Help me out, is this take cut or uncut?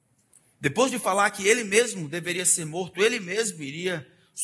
uncut